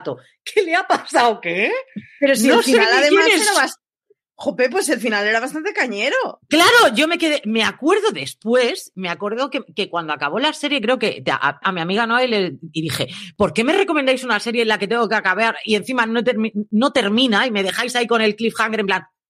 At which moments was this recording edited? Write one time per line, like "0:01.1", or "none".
0:11.6